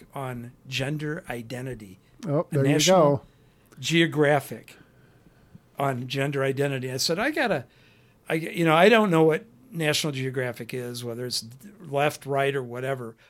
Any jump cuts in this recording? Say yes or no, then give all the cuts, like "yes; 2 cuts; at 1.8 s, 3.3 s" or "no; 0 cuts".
no; 0 cuts